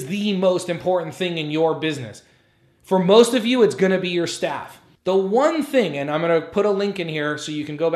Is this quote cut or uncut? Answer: cut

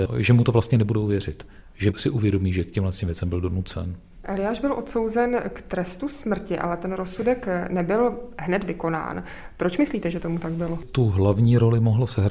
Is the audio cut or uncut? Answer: uncut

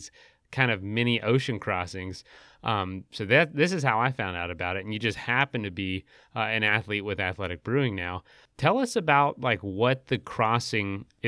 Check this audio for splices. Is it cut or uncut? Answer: uncut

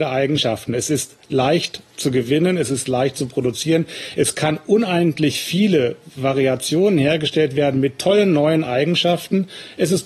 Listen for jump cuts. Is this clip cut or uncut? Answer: uncut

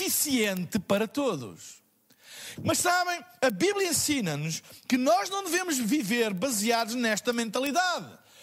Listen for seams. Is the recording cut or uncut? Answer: cut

